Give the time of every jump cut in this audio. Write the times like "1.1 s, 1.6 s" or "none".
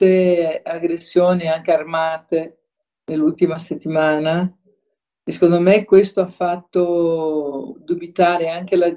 none